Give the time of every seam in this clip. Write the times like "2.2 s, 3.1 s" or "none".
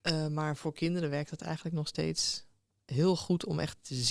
none